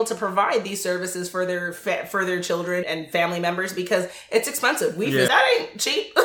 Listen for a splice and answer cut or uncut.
cut